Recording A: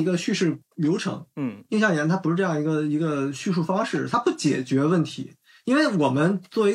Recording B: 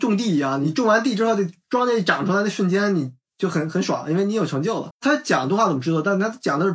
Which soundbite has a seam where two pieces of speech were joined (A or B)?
B